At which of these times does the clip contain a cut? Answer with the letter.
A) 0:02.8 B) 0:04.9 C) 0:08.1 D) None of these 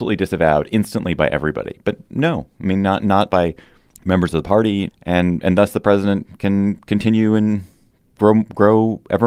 B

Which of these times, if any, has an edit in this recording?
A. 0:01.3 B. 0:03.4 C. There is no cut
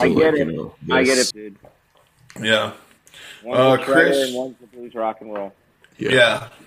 A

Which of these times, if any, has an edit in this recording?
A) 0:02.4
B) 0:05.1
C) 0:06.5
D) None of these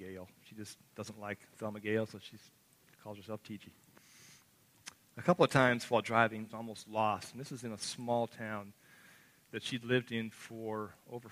C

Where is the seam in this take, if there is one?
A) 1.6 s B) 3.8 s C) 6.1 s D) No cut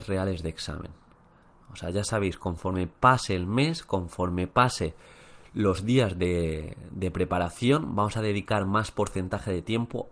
A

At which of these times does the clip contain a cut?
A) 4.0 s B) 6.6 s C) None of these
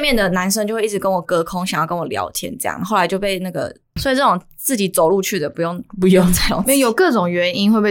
A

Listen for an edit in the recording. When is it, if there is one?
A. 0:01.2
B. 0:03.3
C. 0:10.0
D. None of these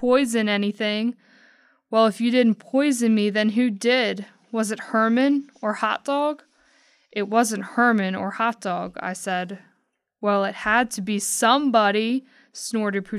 D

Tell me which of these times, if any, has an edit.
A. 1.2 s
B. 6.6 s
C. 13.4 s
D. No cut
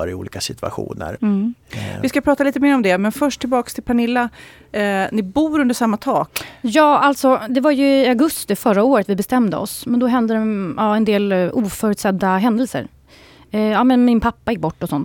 A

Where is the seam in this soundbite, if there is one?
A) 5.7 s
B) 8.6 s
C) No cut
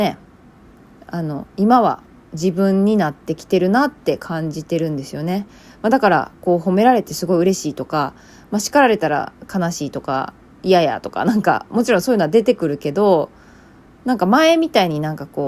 C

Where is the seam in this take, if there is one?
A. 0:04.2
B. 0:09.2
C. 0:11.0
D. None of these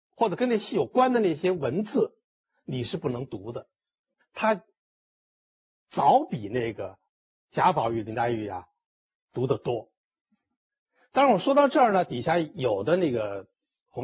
A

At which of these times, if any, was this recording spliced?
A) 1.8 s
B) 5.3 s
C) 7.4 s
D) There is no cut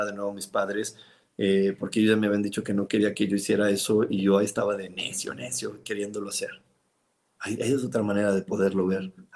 C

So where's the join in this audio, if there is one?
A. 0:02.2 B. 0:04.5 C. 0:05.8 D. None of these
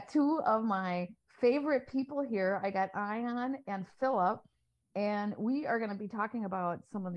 D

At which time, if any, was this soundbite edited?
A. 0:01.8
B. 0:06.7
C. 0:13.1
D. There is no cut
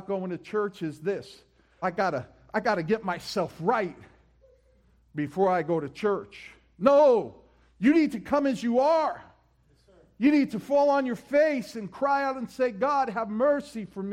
A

